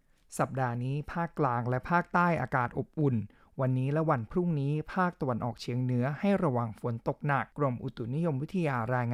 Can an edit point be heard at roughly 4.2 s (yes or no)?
no